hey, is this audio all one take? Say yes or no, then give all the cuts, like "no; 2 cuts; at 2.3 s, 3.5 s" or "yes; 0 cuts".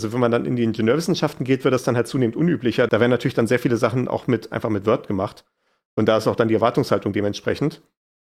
yes; 0 cuts